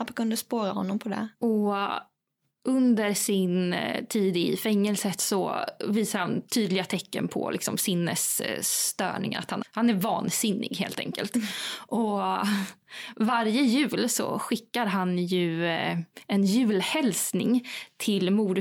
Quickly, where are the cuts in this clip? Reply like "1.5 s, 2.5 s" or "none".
1.3 s, 9.6 s